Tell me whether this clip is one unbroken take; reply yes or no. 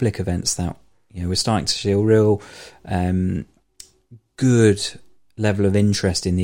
yes